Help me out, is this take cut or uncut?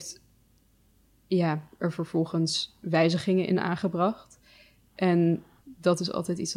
uncut